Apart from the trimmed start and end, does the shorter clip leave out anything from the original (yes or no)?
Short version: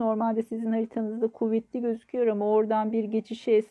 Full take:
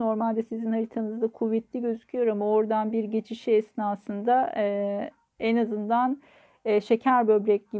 no